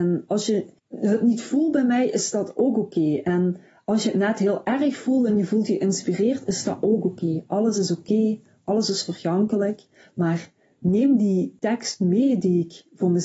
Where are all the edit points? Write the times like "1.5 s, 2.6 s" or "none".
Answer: none